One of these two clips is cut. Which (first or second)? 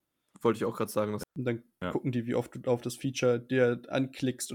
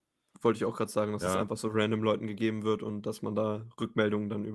first